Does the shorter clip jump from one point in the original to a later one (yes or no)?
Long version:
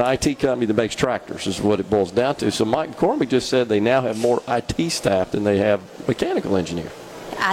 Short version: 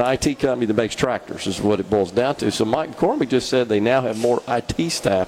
no